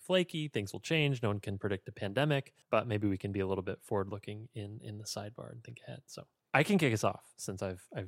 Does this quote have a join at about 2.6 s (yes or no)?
yes